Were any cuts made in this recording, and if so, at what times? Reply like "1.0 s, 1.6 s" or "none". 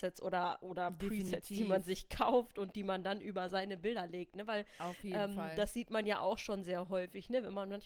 none